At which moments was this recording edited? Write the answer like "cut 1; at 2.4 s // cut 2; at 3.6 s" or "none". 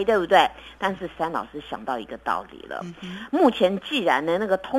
cut 1; at 1.2 s